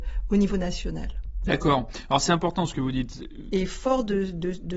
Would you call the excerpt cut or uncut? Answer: cut